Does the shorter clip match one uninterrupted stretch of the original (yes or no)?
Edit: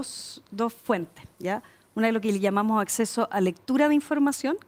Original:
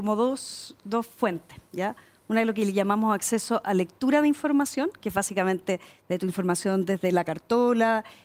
yes